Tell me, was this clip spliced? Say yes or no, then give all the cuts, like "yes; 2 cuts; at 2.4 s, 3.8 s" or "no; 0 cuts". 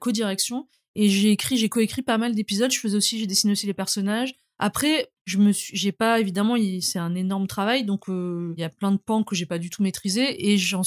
no; 0 cuts